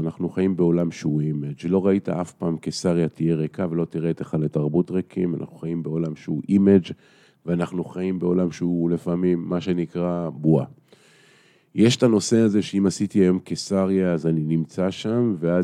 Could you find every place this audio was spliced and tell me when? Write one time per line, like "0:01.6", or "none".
none

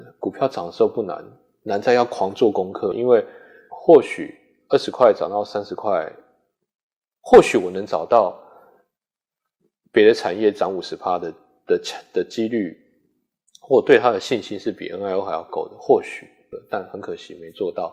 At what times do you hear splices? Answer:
none

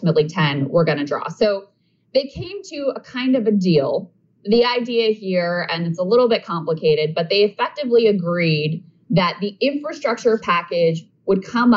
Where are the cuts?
none

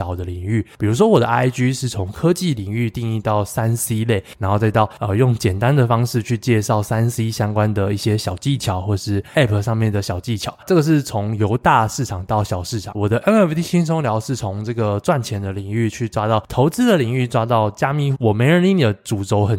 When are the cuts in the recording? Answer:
0:12.9
0:18.1

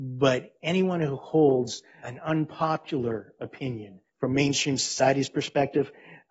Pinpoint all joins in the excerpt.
0:02.0
0:04.1

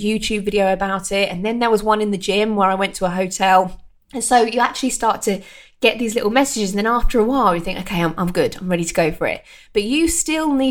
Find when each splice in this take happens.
none

